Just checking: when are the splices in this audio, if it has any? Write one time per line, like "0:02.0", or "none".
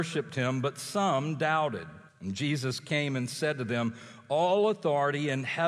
0:02.1

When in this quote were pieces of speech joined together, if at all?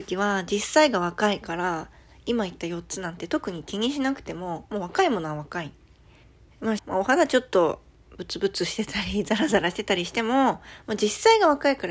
0:06.8

